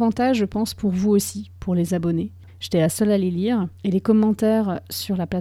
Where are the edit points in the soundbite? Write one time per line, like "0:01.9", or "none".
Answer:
0:02.5
0:03.8